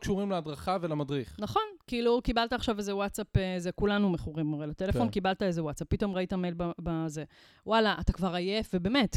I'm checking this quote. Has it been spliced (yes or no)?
no